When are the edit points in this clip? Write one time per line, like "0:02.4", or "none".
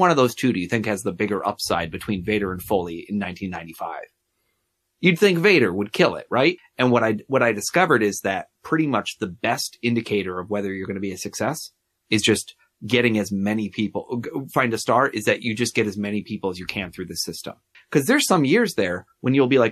0:06.6
0:17.7